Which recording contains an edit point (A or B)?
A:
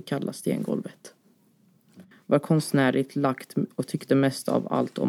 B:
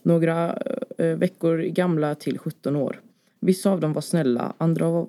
A